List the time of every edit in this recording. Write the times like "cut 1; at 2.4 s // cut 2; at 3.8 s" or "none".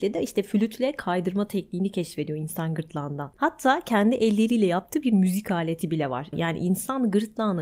cut 1; at 3.3 s // cut 2; at 6.3 s